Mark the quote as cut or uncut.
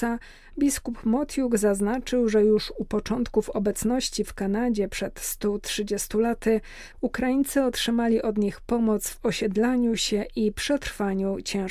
uncut